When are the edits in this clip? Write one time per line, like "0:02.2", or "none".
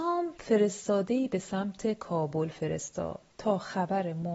0:03.3